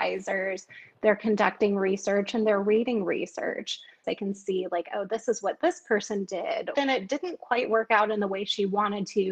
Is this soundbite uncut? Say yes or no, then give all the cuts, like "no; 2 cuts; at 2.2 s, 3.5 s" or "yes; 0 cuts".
no; 2 cuts; at 4.0 s, 6.7 s